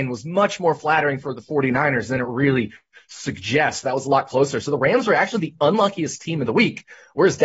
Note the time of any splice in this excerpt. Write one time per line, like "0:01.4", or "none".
none